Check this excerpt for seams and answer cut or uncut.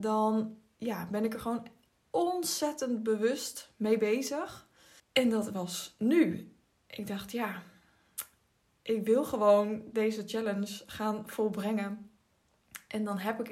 cut